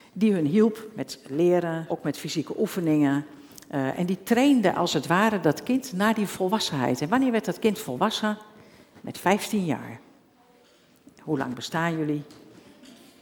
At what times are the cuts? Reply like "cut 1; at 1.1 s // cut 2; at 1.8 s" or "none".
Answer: cut 1; at 1.9 s